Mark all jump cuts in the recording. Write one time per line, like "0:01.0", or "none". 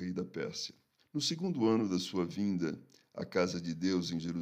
0:01.0